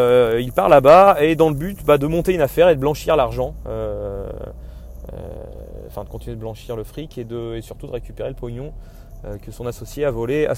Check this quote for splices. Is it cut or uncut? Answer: uncut